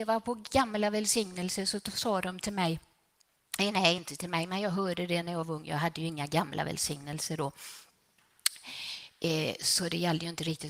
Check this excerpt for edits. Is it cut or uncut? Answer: uncut